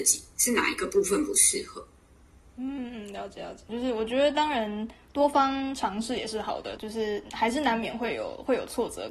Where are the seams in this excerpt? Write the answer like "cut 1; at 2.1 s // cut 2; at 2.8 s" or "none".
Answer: cut 1; at 3.7 s // cut 2; at 6.8 s